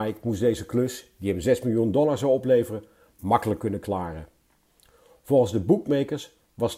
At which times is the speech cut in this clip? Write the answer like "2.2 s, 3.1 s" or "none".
none